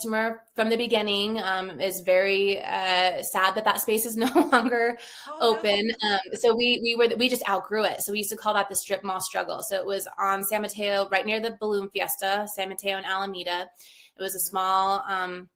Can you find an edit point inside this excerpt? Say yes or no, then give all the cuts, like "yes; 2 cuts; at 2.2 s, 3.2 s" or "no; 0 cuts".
no; 0 cuts